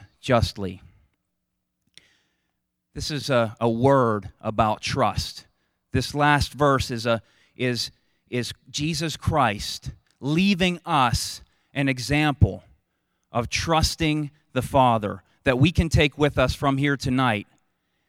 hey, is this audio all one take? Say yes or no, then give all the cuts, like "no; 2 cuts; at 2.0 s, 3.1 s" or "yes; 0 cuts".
yes; 0 cuts